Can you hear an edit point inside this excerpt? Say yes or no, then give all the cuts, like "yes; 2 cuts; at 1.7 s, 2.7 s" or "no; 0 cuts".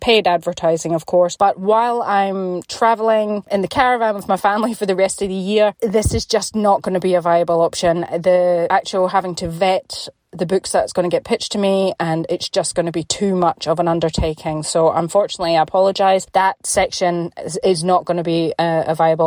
no; 0 cuts